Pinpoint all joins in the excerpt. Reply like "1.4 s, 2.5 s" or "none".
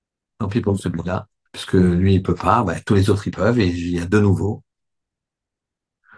1.5 s